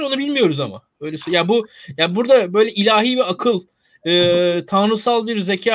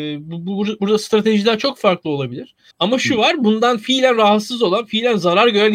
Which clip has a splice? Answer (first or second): second